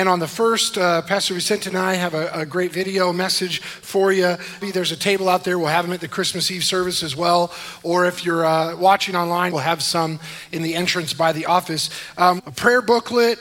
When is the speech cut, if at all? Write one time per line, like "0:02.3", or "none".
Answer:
0:04.6
0:09.5
0:12.4